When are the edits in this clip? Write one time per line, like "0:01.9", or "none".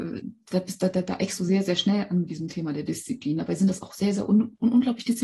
none